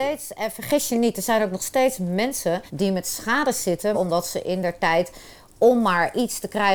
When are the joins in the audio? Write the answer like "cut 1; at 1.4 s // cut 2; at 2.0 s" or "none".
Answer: cut 1; at 2.7 s // cut 2; at 3.9 s